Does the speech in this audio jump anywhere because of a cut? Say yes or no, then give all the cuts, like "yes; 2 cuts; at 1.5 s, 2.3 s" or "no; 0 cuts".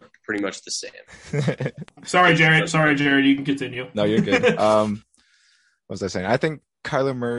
no; 0 cuts